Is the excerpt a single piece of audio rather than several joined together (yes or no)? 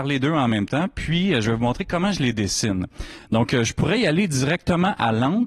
yes